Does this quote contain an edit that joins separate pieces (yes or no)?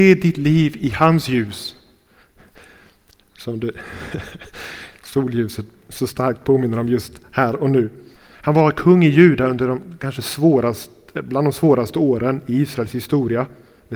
yes